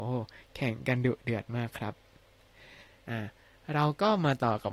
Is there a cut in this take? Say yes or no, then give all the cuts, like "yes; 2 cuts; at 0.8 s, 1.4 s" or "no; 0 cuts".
no; 0 cuts